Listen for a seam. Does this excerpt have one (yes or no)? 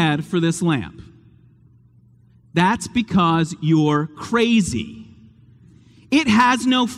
no